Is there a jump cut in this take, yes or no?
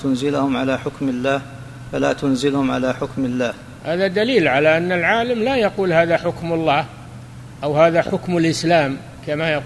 no